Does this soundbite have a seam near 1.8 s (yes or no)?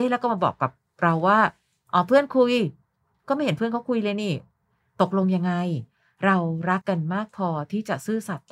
no